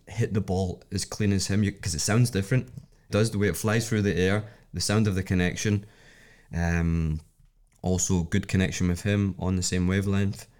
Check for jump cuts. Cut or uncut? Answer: cut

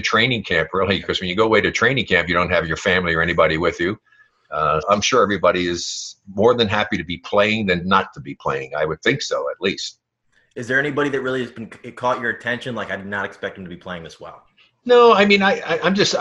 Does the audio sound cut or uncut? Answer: cut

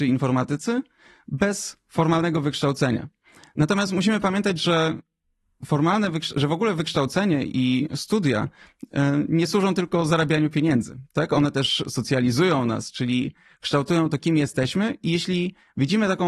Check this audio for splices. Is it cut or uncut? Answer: uncut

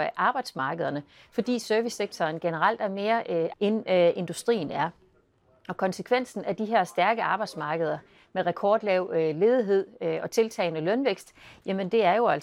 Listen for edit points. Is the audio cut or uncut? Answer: cut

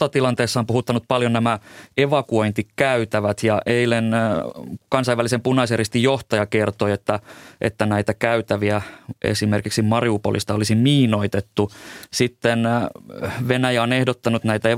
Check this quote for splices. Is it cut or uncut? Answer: uncut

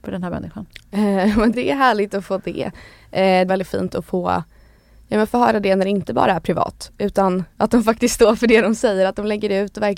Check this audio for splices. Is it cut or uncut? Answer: cut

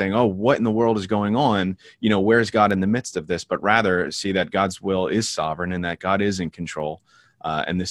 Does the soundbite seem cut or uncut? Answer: uncut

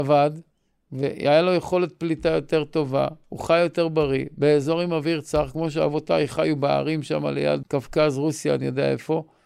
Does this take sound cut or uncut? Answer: cut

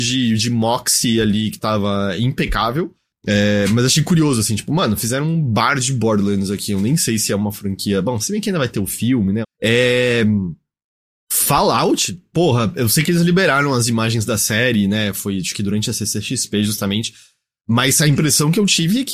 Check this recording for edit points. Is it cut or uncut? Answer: cut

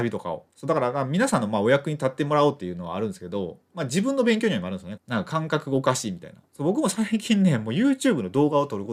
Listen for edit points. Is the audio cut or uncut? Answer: cut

